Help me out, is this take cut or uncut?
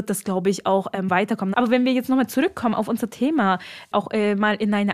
cut